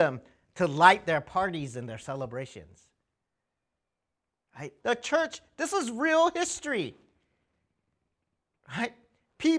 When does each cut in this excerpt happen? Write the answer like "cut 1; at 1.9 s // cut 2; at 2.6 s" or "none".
cut 1; at 4.8 s